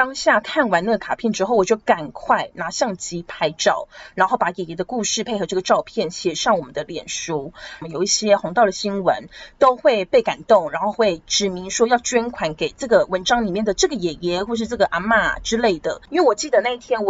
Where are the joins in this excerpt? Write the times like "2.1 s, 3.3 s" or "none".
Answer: 7.8 s, 16.1 s